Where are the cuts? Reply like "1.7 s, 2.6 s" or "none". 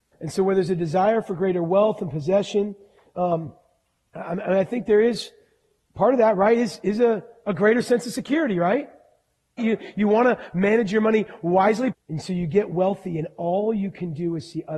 9.6 s, 11.9 s